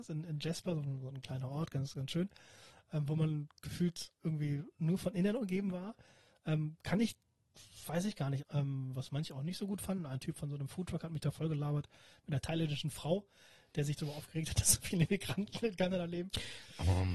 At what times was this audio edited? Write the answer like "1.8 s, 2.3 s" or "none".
8.4 s